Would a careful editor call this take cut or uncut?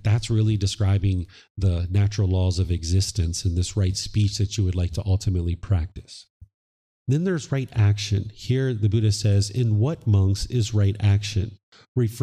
uncut